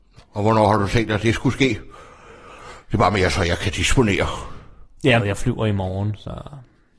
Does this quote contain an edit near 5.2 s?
yes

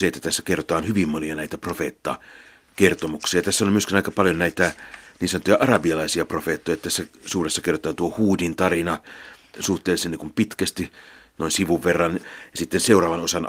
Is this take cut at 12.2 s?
yes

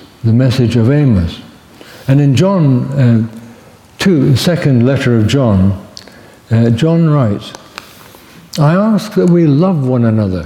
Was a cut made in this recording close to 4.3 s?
no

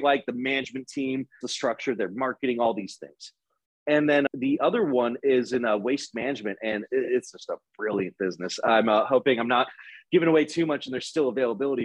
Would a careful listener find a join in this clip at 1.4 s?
yes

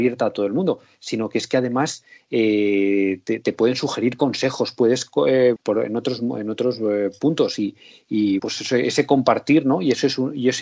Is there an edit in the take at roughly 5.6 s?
yes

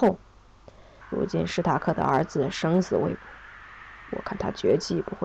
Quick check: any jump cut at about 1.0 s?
yes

